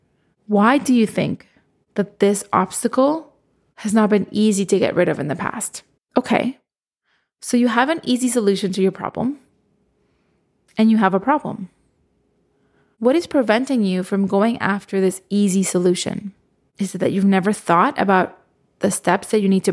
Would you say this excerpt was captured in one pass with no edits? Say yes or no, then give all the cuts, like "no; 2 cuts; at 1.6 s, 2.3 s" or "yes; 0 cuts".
no; 2 cuts; at 6.0 s, 16.7 s